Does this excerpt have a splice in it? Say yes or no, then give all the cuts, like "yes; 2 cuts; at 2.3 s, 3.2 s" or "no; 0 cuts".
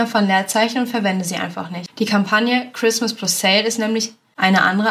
no; 0 cuts